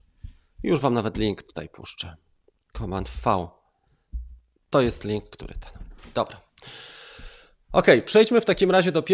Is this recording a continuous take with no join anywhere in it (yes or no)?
yes